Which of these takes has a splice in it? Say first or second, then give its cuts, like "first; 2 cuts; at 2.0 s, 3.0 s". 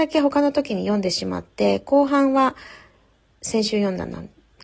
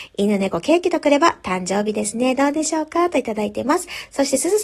first; 1 cut; at 3.3 s